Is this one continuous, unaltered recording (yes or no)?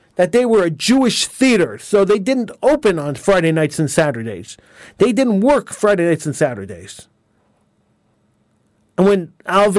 yes